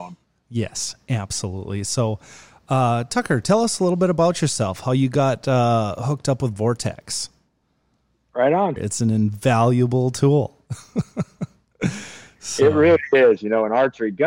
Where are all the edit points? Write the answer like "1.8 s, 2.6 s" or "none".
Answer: 8.8 s